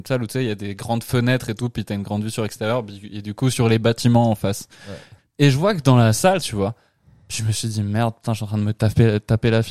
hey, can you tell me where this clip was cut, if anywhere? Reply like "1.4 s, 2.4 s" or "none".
5.2 s, 6.4 s